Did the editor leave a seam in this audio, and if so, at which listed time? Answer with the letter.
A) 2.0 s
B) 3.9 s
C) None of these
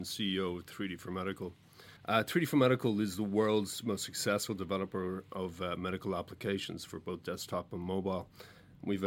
A